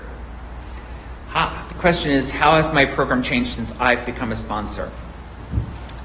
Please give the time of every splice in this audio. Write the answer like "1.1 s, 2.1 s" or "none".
none